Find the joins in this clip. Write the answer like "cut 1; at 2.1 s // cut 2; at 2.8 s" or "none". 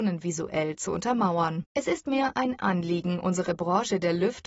cut 1; at 1.7 s